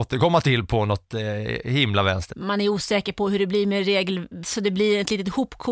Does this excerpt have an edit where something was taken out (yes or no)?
yes